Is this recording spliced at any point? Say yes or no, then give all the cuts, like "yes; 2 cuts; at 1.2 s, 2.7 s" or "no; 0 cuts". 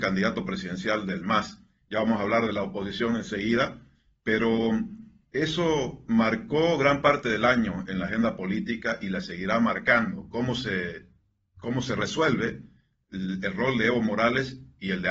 yes; 1 cut; at 1.8 s